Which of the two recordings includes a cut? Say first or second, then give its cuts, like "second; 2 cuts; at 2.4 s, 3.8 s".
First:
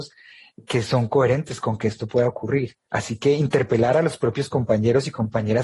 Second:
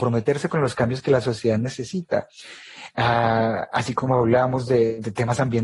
second; 1 cut; at 2.9 s